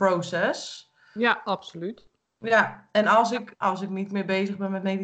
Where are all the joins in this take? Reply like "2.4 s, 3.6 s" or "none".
3.6 s